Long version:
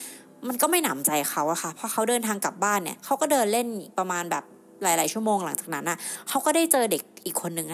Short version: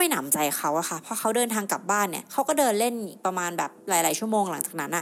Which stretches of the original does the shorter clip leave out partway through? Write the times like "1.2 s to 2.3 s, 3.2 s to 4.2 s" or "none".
4.5 s to 4.7 s

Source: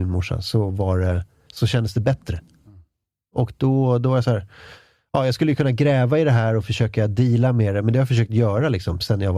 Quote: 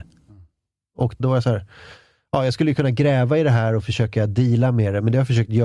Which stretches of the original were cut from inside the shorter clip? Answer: 3.6 s to 4.0 s

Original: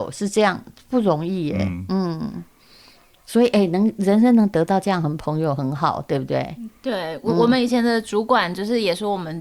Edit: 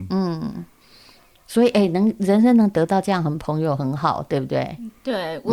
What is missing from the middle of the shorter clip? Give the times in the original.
none

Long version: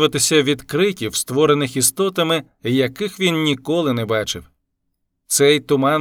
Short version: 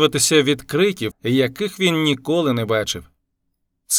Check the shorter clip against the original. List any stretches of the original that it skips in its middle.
1.1 s to 2.5 s

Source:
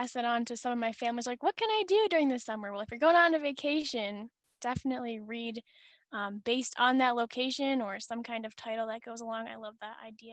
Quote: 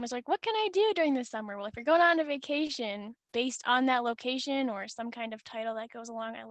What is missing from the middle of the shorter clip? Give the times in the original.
4.5 s to 6.4 s

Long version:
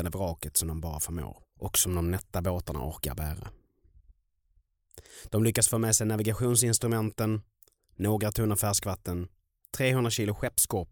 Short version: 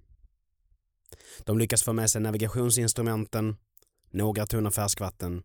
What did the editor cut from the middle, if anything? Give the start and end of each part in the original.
none

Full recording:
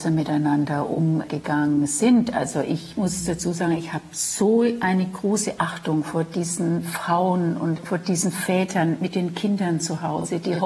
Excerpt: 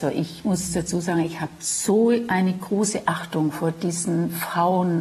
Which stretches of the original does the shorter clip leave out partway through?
none

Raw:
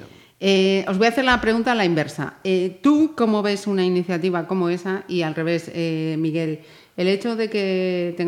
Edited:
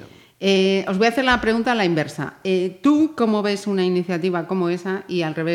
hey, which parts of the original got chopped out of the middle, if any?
none

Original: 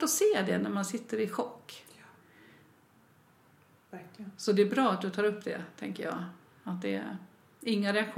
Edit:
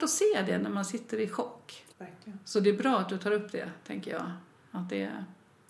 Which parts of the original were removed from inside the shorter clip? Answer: 1.9 s to 3.8 s

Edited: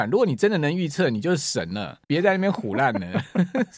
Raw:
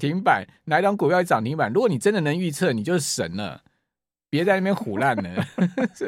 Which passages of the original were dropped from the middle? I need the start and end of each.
3.7 s to 4.3 s

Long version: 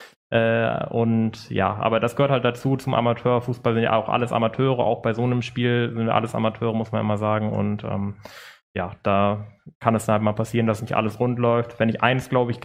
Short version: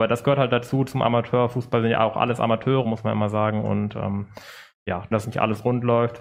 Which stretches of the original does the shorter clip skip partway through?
4.8 s to 6.7 s, 9.0 s to 10.7 s

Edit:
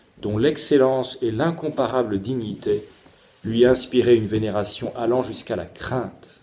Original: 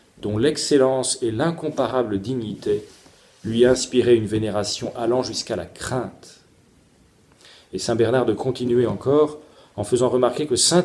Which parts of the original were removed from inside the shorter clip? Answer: none

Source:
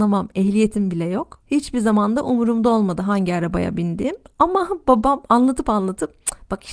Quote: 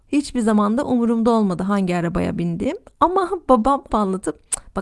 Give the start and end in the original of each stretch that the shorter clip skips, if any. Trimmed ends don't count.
5.3 s to 5.6 s

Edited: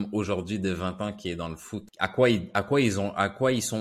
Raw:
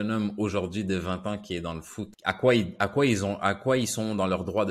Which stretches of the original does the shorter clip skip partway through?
none

